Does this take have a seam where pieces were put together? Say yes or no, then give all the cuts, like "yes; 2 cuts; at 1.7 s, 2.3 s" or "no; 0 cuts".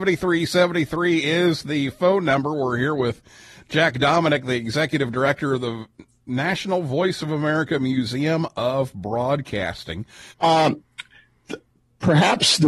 yes; 1 cut; at 10.3 s